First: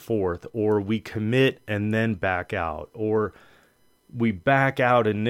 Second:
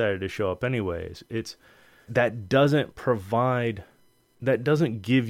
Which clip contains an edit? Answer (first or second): second